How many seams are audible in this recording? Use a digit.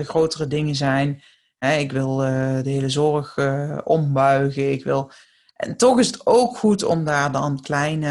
0